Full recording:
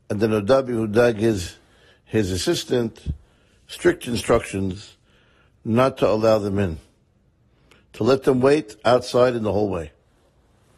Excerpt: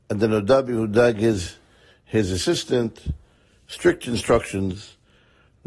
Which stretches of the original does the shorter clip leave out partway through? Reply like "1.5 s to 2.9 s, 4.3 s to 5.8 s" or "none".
none